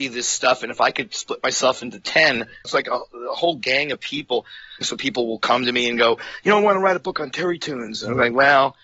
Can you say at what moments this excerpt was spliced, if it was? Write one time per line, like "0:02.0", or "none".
0:02.6
0:04.8